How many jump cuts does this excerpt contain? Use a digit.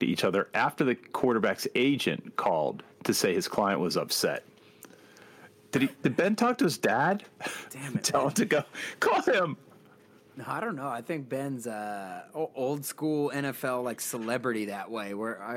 0